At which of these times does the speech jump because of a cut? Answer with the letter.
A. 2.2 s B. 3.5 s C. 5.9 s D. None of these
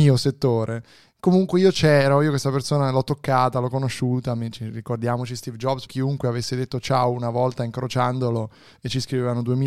C